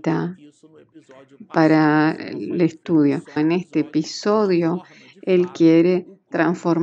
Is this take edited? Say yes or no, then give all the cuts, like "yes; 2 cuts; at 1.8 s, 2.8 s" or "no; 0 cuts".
yes; 1 cut; at 3.4 s